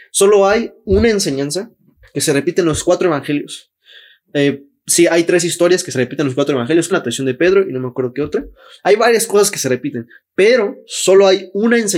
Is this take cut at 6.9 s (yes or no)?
yes